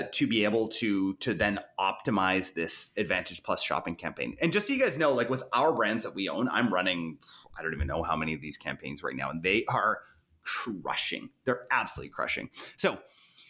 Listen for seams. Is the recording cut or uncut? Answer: uncut